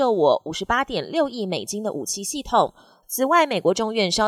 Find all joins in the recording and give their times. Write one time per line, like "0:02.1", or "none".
0:03.0